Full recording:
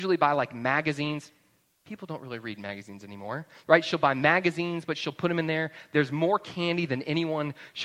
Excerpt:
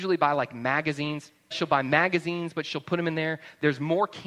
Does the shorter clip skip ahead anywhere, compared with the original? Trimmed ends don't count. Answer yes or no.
yes